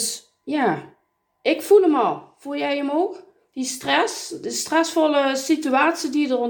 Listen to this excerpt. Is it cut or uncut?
uncut